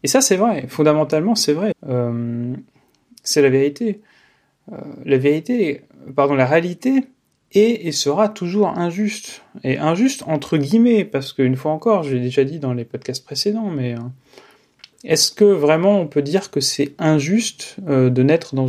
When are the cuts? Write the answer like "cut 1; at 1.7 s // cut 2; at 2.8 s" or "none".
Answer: cut 1; at 1.7 s